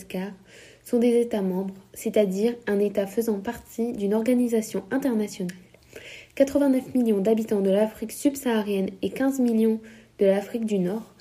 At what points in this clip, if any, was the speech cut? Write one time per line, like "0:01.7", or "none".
none